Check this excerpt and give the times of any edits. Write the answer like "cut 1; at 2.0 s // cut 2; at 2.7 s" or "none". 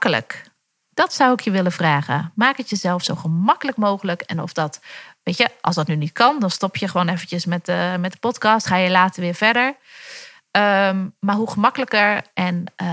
none